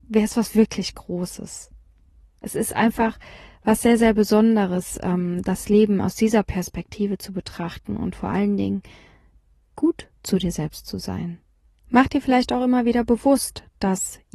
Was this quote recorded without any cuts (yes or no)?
no